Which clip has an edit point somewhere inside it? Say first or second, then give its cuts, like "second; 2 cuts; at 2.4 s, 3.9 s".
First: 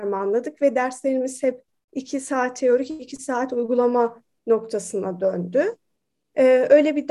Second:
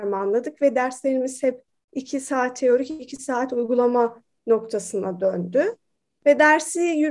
second; 1 cut; at 6.2 s